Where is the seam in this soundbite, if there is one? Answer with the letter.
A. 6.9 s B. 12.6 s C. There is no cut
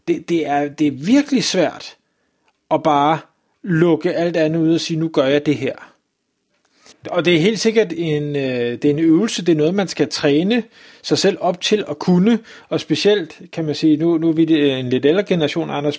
A